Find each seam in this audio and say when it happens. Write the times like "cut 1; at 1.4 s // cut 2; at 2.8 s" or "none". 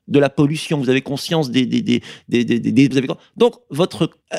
cut 1; at 2.9 s

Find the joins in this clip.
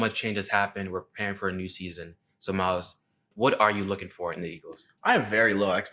cut 1; at 3.3 s

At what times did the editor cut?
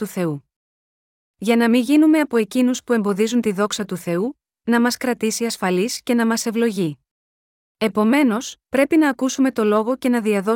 cut 1; at 4.5 s // cut 2; at 7.7 s

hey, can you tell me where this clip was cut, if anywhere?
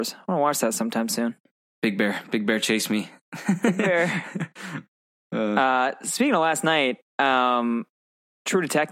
none

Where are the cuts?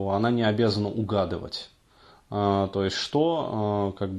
none

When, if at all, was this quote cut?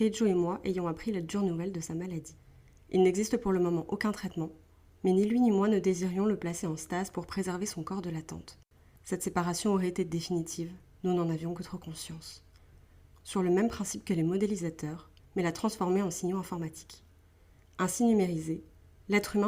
cut 1; at 13.1 s // cut 2; at 15.2 s

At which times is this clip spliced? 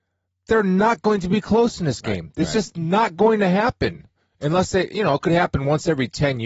none

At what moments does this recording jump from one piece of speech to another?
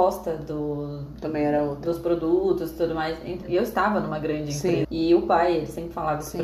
cut 1; at 3.4 s // cut 2; at 4.8 s

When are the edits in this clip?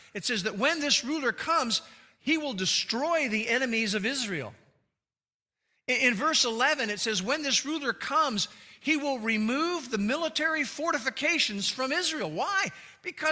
none

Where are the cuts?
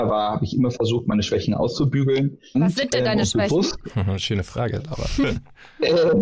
cut 1; at 2.5 s

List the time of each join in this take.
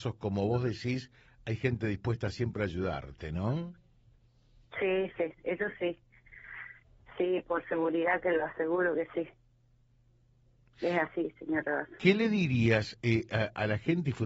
none

